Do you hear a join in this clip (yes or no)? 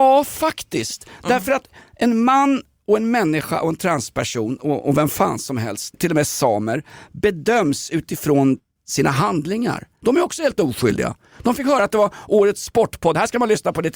yes